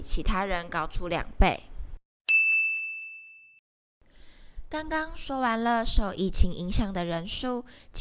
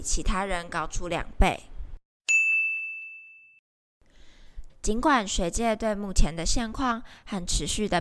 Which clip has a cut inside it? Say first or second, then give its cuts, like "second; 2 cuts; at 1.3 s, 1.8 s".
second; 1 cut; at 4.7 s